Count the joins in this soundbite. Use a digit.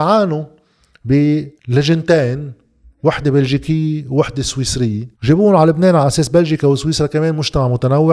2